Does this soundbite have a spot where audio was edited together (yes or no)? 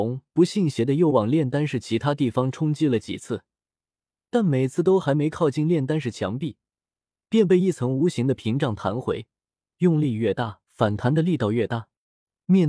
yes